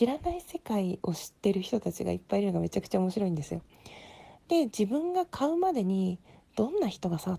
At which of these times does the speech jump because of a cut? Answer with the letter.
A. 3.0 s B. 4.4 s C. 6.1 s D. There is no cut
B